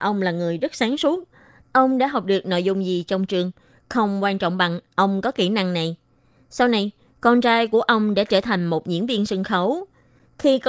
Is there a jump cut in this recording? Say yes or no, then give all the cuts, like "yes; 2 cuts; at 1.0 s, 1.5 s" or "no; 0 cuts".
yes; 1 cut; at 1.6 s